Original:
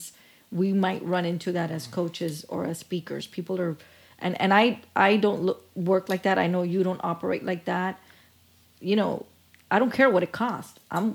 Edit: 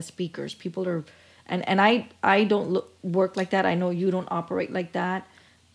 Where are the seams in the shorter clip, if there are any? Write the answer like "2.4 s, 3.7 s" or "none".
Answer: none